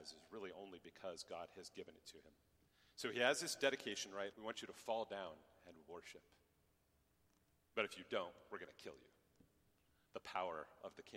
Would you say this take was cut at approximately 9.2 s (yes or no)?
no